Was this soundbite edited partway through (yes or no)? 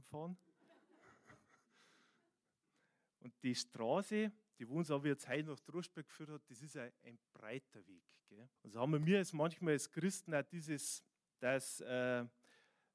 yes